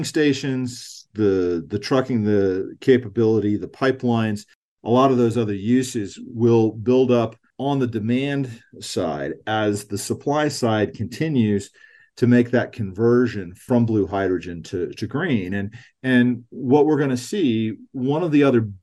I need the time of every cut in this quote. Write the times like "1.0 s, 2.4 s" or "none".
none

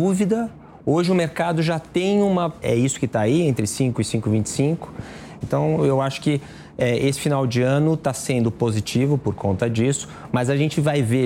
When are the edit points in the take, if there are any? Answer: 2.6 s, 5.4 s

